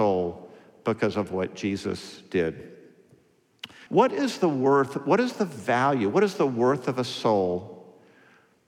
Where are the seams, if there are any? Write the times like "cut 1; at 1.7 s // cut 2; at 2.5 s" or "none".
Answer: cut 1; at 3.9 s

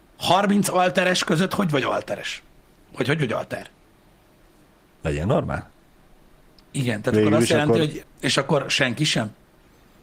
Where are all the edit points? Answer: cut 1; at 4.9 s // cut 2; at 8.0 s

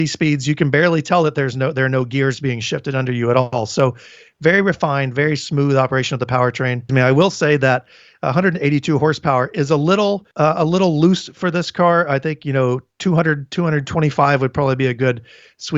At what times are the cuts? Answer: cut 1; at 10.3 s

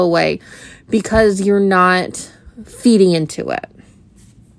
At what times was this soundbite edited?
none

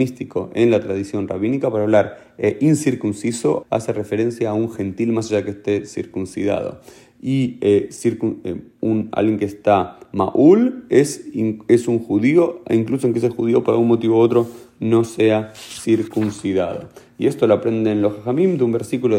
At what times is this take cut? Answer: cut 1; at 3.6 s

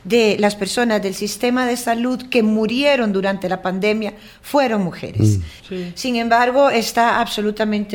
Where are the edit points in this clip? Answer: cut 1; at 5.6 s

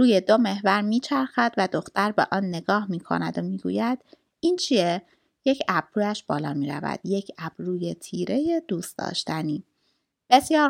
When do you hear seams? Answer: none

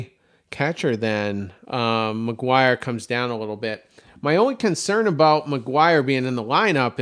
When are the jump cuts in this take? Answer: cut 1; at 1.6 s

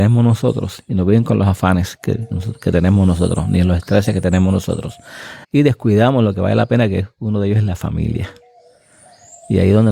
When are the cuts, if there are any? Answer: cut 1; at 5.4 s

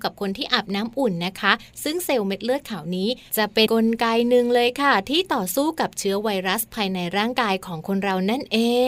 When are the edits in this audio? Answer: cut 1; at 3.7 s

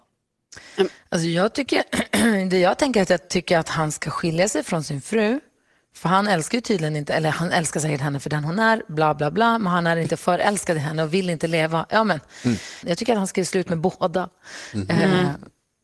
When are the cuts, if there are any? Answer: cut 1; at 12.8 s

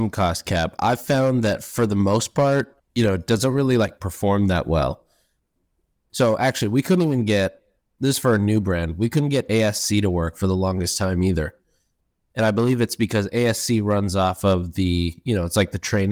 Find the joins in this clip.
cut 1; at 2.8 s // cut 2; at 5.9 s

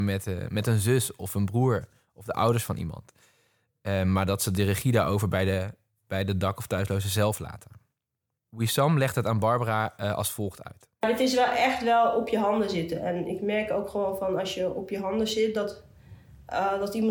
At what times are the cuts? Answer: none

